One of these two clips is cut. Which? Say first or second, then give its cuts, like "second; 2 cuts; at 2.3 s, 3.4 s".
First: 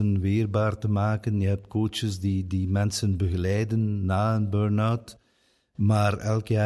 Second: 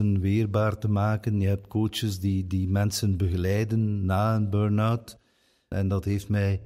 second; 1 cut; at 5.7 s